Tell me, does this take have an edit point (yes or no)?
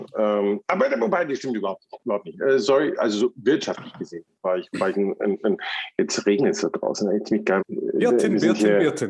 yes